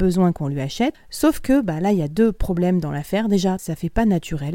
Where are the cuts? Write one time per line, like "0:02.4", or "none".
0:00.9
0:03.6